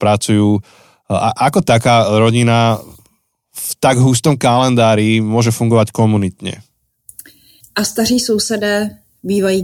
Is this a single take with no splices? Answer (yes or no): no